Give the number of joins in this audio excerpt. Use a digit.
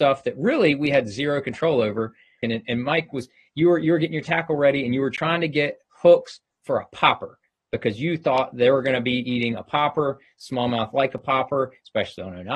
1